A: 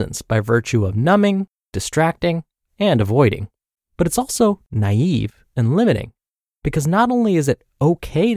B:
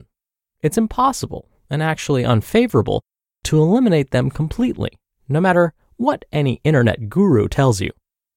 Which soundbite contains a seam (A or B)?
A